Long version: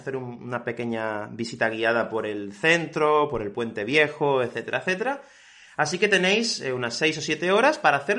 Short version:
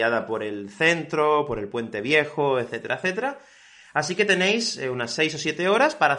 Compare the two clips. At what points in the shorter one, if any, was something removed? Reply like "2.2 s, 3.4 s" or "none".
none

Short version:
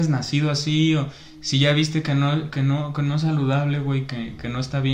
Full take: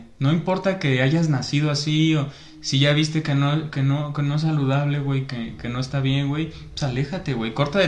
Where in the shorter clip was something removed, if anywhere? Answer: none

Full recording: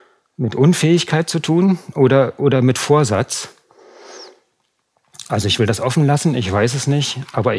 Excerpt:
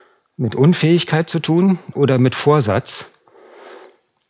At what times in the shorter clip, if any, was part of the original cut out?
1.9 s

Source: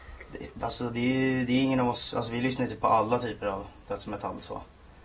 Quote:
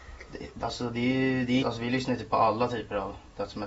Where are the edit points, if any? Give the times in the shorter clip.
1.6 s

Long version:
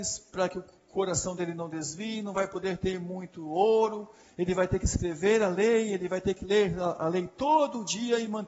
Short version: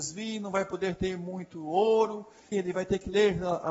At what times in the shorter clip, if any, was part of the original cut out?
2.5 s

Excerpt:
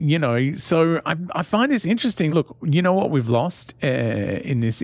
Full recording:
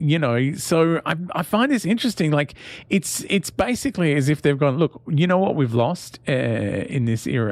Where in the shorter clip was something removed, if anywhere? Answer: 2.3 s

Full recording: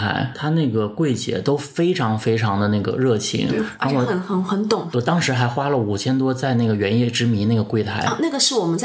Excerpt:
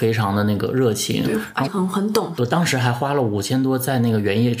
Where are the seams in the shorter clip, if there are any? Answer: 1.7 s

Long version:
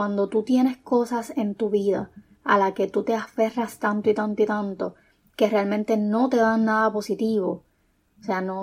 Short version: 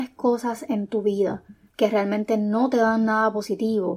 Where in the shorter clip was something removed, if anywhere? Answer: 1.7 s

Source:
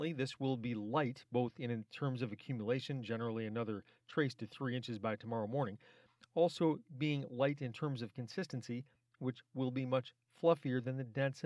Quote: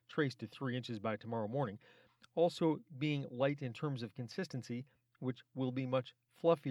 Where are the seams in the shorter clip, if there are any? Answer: none

